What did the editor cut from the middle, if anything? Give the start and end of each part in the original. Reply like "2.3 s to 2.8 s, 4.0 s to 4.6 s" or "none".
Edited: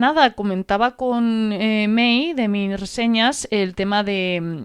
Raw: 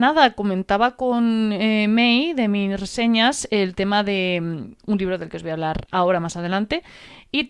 none

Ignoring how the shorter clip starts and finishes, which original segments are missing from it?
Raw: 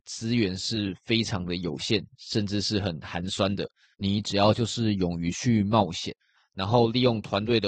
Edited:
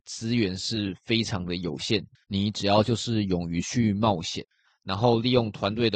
2.2 s to 3.9 s

